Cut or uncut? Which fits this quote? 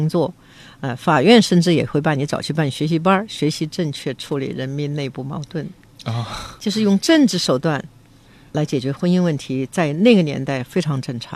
uncut